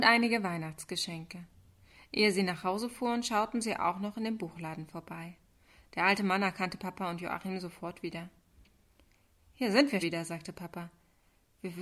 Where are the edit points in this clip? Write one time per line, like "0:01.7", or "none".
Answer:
0:10.0